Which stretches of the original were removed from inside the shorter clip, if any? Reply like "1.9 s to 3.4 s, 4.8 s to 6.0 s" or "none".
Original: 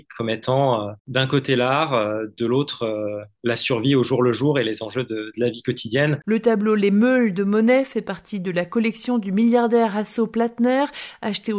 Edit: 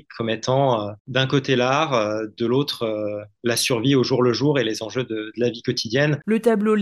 none